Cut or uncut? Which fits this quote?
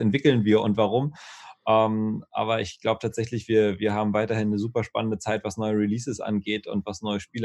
uncut